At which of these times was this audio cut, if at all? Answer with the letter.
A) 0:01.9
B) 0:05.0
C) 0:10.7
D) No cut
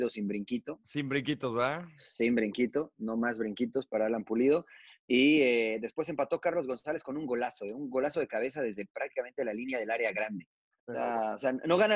C